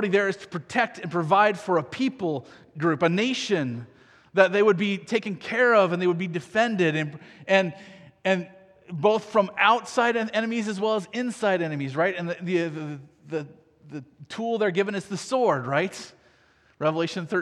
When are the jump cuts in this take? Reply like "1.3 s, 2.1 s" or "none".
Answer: none